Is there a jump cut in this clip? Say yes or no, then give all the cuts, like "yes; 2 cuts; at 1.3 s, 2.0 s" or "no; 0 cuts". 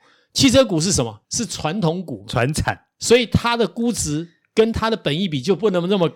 yes; 1 cut; at 1.2 s